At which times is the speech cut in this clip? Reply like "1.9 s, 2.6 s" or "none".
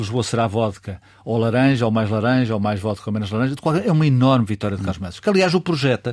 none